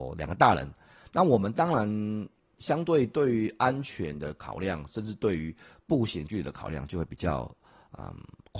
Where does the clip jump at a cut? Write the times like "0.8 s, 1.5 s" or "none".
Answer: none